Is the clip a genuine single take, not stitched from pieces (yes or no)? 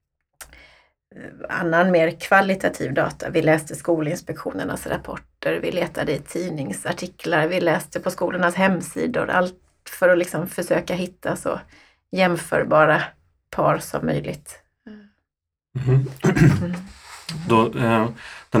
yes